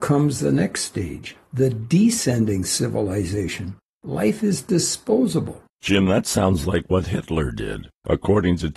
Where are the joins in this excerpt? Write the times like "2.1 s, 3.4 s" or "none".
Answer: 4.0 s, 5.7 s

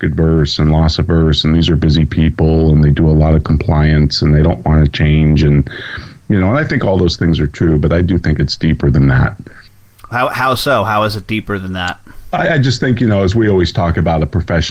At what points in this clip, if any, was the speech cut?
none

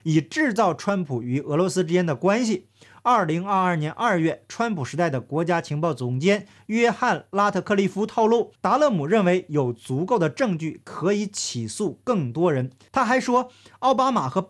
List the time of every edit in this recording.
8.6 s

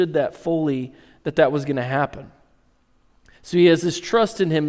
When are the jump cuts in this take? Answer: none

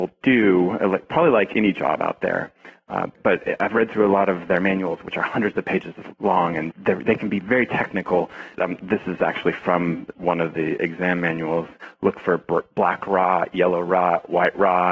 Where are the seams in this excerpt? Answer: 6.7 s, 8.5 s

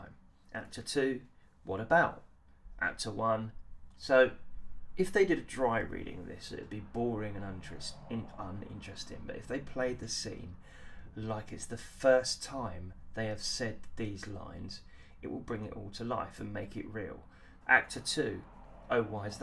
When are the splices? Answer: 3.9 s, 17.6 s

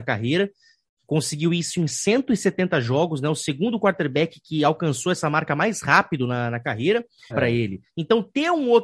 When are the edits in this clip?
7.3 s

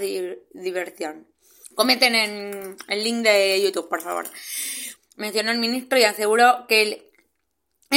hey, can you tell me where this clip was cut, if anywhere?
1.6 s, 5.0 s

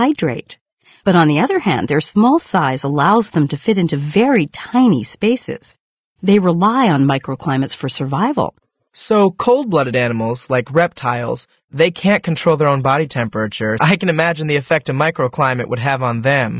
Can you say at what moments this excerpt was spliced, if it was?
6.2 s, 13.8 s

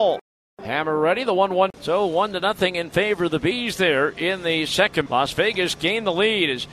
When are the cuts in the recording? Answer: 1.7 s, 5.1 s

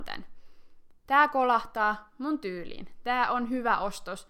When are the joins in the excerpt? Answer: 1.1 s

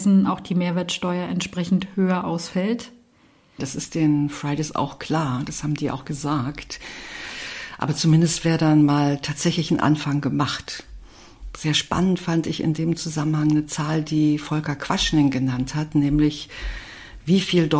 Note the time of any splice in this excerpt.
3.6 s

